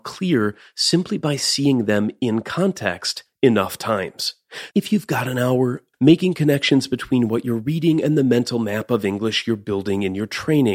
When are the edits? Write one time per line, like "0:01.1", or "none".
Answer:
0:04.7
0:05.9

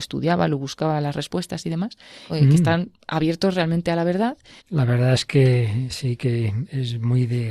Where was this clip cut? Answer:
0:02.3
0:04.6

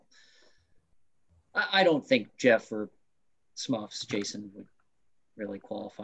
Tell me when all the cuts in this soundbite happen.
none

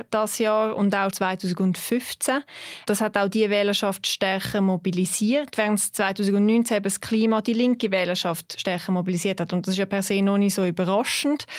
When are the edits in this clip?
0:01.1

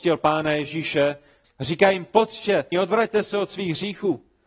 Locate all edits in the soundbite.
0:01.4
0:02.7

